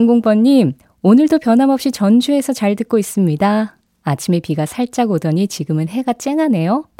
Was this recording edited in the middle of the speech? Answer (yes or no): no